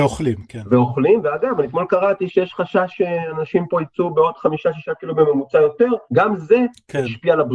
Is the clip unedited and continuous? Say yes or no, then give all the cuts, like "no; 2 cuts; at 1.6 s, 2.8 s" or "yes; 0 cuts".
yes; 0 cuts